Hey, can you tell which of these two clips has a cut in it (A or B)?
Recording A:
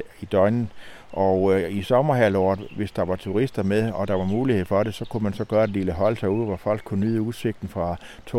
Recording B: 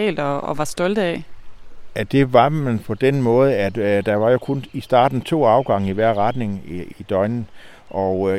B